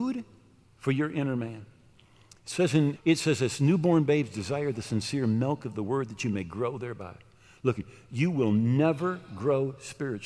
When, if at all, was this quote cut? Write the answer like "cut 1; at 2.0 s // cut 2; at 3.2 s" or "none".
cut 1; at 2.9 s

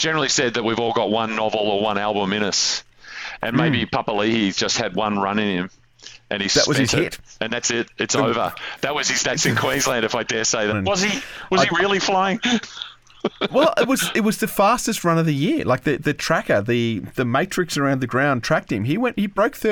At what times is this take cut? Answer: cut 1; at 10.7 s

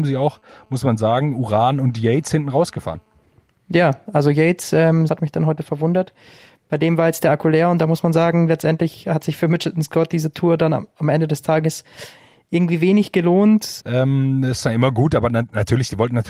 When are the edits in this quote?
cut 1; at 5.1 s // cut 2; at 13.8 s

